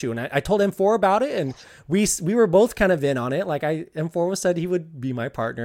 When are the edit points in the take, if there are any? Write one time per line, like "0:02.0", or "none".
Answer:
none